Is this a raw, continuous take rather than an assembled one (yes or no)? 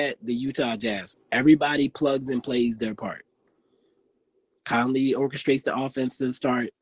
no